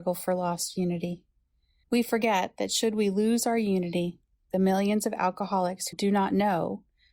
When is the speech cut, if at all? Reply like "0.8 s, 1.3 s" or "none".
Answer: 1.8 s, 5.9 s